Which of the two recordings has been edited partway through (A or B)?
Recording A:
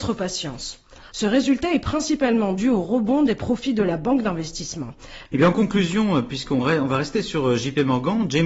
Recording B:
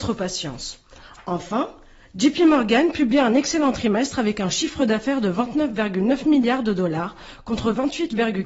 A